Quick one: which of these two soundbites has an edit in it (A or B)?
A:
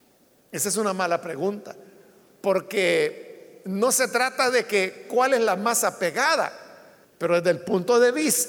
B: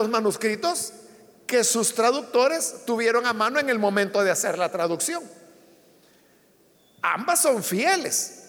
A